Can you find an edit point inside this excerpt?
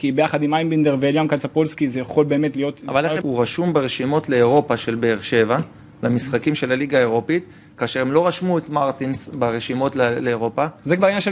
yes; 1 cut; at 3.2 s

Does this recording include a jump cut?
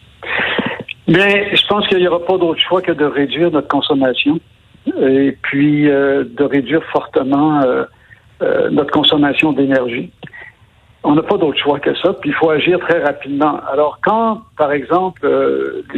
no; 0 cuts

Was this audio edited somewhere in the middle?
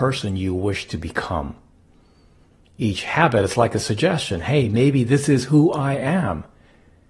no; 0 cuts

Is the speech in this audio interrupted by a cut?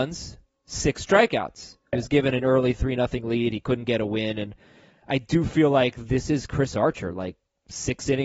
yes; 1 cut; at 1.9 s

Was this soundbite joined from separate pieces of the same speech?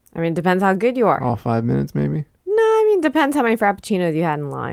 no; 0 cuts

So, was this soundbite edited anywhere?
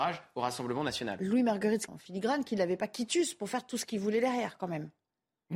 yes; 1 cut; at 1.9 s

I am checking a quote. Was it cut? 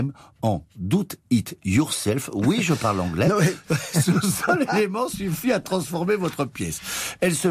no; 0 cuts

